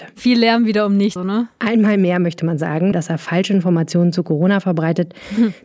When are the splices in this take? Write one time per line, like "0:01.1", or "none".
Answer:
0:01.2
0:02.9